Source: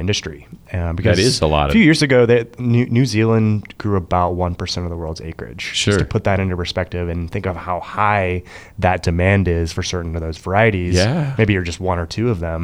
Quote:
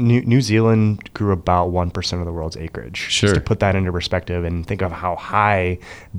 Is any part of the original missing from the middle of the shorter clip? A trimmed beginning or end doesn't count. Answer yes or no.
no